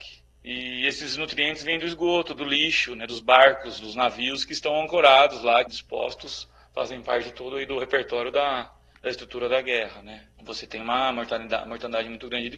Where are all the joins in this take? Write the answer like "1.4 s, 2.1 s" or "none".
5.7 s